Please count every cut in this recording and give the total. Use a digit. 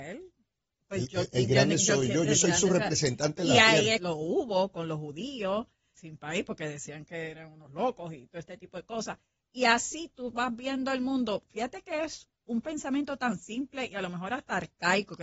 2